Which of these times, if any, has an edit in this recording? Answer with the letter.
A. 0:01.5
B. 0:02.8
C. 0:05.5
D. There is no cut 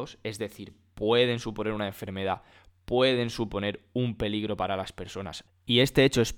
C